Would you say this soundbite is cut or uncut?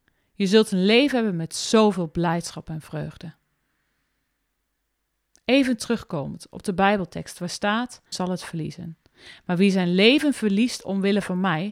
cut